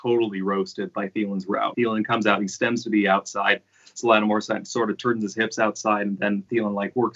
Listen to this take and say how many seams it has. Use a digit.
1